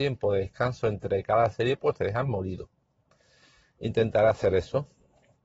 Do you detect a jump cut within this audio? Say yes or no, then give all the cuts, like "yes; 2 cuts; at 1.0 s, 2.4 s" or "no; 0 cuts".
no; 0 cuts